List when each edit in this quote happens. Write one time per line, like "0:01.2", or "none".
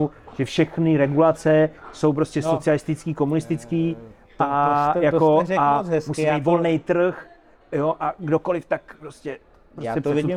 none